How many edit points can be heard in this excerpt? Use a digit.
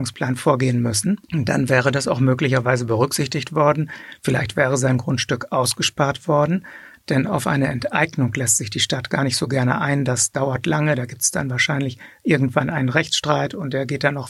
1